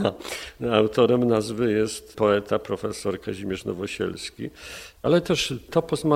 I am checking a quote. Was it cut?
yes; 1 cut; at 5.0 s

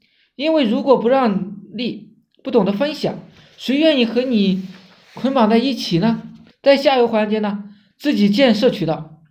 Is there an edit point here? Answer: yes; 2 cuts; at 6.5 s, 7.9 s

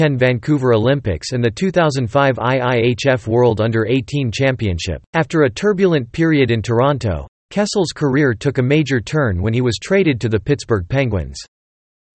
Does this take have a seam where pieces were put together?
yes; 1 cut; at 5.1 s

